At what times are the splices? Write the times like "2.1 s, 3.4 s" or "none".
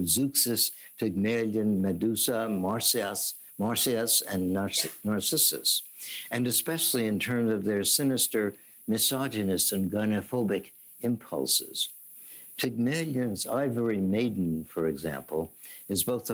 none